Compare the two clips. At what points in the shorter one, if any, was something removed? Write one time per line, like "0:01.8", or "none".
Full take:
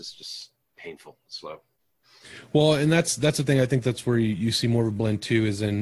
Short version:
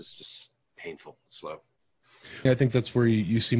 0:02.5